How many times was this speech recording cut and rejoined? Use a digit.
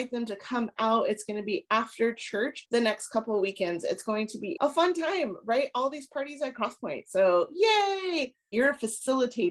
1